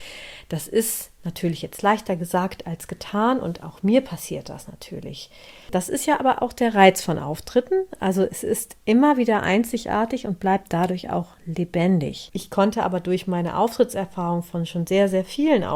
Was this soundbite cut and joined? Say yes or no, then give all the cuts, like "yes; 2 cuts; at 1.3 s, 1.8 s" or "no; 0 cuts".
yes; 2 cuts; at 5.7 s, 12.3 s